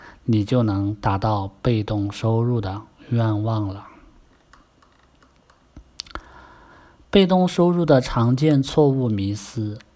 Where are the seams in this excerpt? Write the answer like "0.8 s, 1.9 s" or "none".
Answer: none